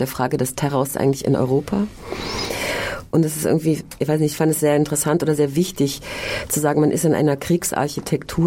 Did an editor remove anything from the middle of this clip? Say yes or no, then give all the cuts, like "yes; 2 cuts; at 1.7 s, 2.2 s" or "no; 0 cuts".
no; 0 cuts